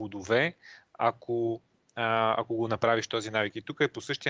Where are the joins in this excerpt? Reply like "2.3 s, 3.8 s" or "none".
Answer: none